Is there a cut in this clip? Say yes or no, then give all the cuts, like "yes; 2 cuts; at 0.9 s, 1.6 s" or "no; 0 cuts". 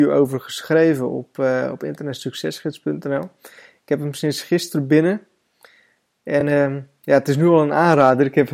no; 0 cuts